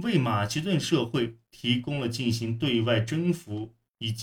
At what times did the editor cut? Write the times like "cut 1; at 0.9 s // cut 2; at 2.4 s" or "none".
none